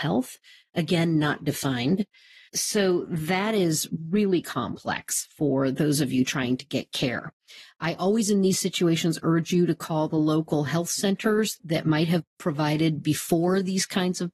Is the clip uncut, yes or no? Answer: no